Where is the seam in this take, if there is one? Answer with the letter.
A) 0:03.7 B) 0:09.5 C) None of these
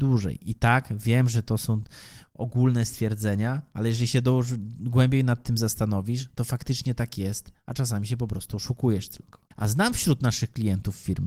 B